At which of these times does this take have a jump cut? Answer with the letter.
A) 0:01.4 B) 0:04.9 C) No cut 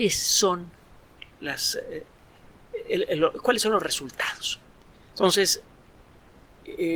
B